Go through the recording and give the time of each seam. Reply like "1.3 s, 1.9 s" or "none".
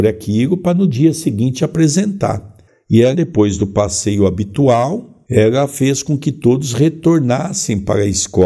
3.1 s, 5.2 s